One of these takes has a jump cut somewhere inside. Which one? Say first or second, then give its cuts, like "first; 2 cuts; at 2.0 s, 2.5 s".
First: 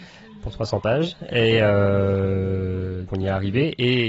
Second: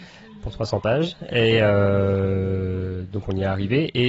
first; 1 cut; at 3.1 s